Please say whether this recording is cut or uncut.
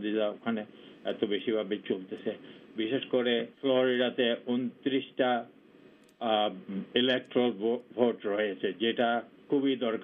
cut